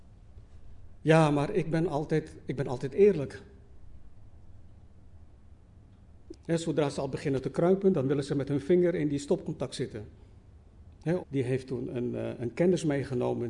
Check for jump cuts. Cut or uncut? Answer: cut